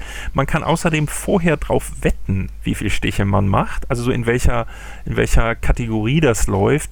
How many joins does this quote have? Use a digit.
0